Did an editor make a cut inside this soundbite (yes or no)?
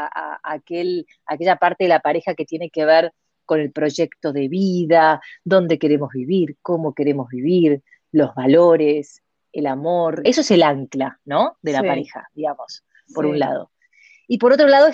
yes